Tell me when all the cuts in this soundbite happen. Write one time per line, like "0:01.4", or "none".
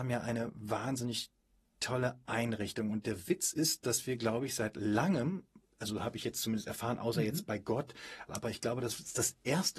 0:08.3